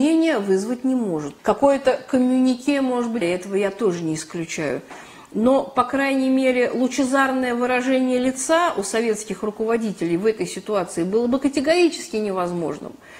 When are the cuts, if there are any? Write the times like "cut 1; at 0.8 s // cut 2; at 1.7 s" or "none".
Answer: cut 1; at 1.4 s // cut 2; at 3.2 s